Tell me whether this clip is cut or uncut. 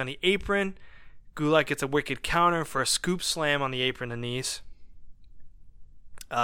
uncut